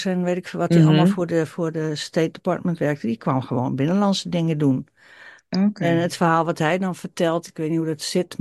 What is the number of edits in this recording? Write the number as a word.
zero